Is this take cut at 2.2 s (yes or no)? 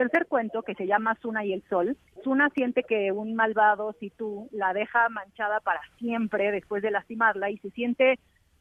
yes